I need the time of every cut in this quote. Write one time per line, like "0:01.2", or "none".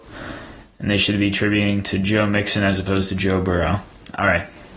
none